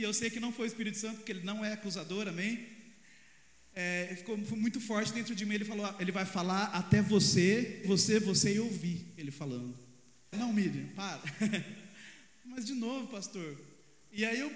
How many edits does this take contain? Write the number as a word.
two